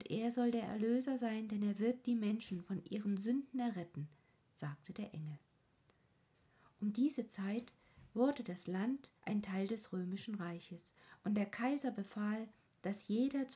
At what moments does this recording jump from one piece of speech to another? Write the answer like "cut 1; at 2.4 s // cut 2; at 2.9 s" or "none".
cut 1; at 9.2 s